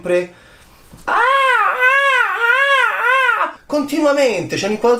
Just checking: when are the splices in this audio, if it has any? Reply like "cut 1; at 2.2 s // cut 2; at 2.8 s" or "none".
cut 1; at 1.1 s // cut 2; at 3.6 s